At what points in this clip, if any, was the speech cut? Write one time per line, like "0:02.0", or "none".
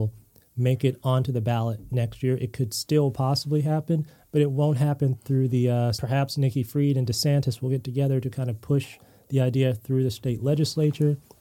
0:05.9